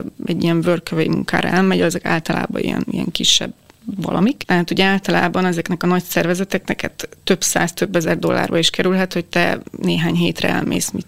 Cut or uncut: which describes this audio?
cut